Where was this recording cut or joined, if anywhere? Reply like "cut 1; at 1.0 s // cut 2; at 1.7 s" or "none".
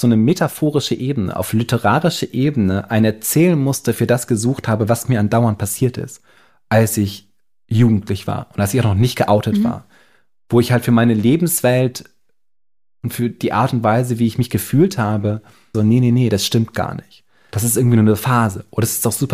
cut 1; at 15.7 s